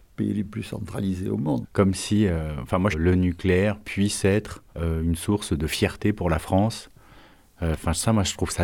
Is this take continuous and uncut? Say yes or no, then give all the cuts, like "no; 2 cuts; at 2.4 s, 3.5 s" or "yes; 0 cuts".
no; 3 cuts; at 1.6 s, 2.9 s, 4.7 s